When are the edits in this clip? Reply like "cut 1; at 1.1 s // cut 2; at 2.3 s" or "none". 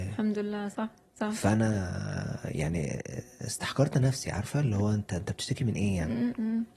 none